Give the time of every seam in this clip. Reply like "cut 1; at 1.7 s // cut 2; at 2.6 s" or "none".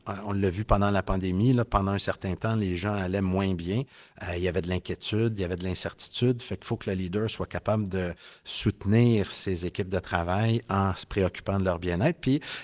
none